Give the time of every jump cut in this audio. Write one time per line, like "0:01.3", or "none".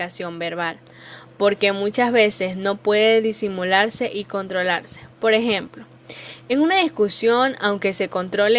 none